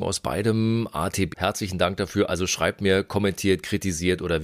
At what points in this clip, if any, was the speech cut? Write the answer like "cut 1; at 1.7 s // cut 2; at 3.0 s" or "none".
cut 1; at 1.3 s